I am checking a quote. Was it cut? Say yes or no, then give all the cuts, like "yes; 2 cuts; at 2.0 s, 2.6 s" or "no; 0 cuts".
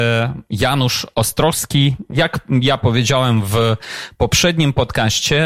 no; 0 cuts